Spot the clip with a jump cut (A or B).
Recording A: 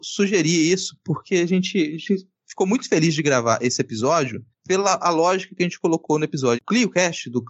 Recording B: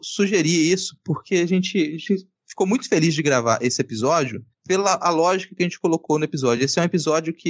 A